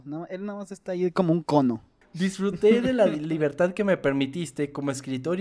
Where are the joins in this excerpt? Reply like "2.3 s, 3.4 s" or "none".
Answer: 2.0 s